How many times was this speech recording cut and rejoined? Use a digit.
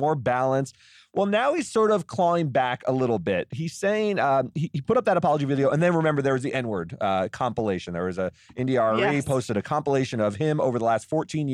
0